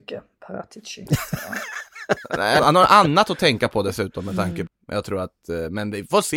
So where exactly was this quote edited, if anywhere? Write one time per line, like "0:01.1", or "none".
0:02.6
0:04.7